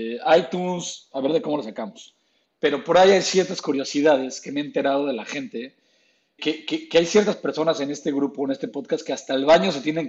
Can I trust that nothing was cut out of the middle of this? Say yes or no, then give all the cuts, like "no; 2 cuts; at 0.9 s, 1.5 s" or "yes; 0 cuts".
no; 1 cut; at 6.4 s